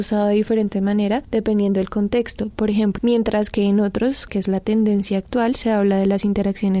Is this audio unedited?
no; 2 cuts; at 3.0 s, 4.3 s

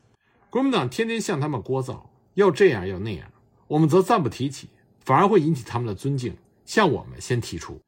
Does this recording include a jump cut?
no; 0 cuts

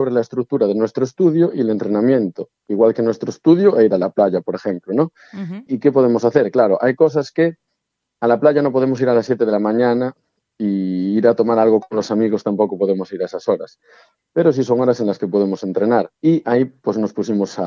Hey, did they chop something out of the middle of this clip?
no; 0 cuts

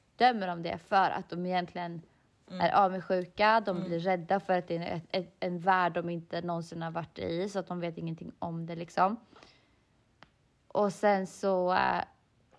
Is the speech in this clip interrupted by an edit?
yes; 1 cut; at 5.1 s

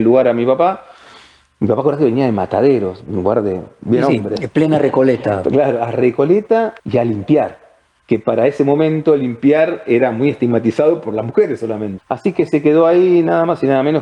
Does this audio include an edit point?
yes; 2 cuts; at 6.8 s, 12.0 s

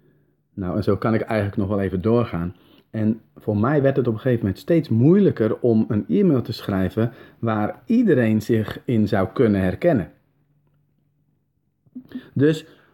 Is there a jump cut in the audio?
no; 0 cuts

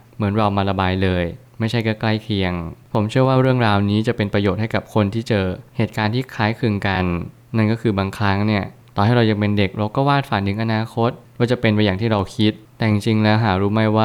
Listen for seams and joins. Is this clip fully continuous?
yes; 0 cuts

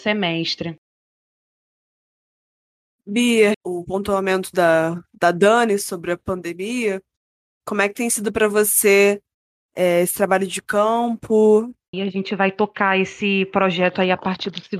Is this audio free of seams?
no; 2 cuts; at 3.5 s, 11.9 s

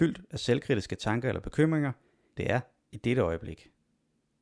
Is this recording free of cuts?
no; 1 cut; at 2.4 s

